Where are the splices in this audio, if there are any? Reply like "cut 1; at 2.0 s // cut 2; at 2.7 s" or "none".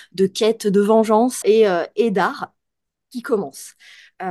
cut 1; at 1.4 s